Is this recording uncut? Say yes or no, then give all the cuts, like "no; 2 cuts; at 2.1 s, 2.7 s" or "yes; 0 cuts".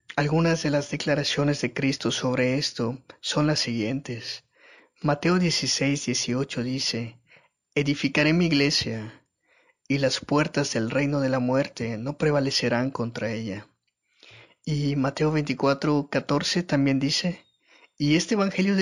yes; 0 cuts